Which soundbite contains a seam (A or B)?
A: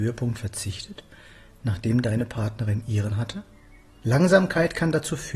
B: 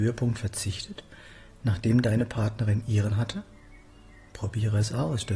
A